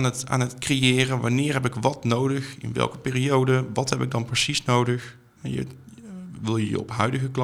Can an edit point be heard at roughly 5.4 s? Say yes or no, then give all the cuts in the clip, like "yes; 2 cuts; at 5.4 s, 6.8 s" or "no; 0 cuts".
yes; 1 cut; at 5.4 s